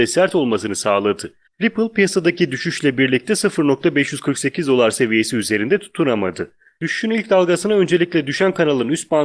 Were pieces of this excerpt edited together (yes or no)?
yes